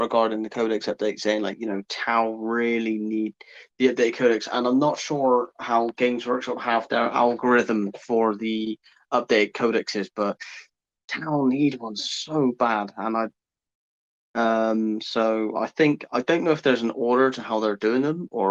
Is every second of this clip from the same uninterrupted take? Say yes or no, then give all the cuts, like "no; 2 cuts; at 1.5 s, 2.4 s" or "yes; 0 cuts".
yes; 0 cuts